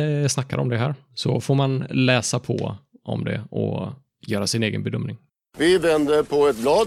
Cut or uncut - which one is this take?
uncut